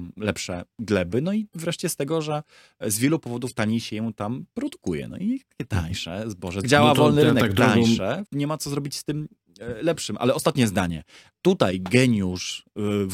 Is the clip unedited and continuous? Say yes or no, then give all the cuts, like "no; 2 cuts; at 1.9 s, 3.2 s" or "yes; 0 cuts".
no; 3 cuts; at 6.6 s, 8.2 s, 11.4 s